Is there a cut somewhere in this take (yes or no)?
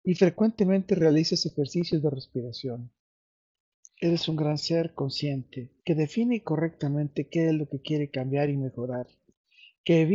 yes